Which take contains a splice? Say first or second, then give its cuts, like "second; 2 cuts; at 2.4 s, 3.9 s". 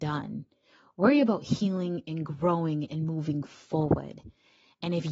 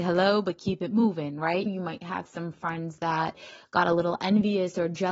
second; 1 cut; at 1.7 s